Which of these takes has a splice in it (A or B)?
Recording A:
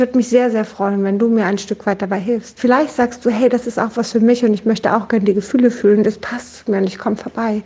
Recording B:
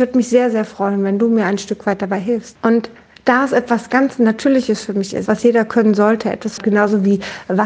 B